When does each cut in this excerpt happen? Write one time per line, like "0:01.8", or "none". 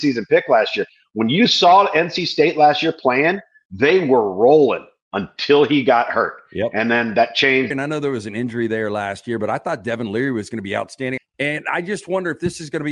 0:07.7
0:11.2